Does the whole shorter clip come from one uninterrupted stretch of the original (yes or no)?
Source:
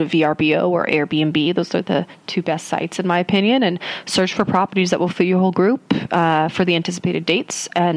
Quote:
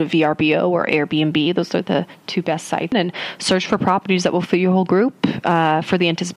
no